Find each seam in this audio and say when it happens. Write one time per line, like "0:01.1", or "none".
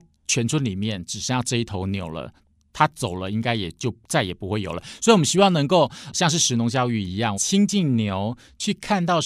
0:06.1
0:07.3